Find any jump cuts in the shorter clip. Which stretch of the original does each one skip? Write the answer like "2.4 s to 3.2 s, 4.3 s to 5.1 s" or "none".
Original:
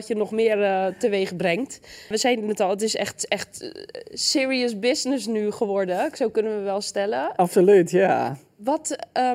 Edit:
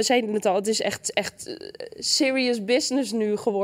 none